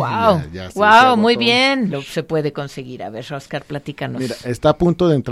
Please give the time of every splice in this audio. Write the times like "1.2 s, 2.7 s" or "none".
1.9 s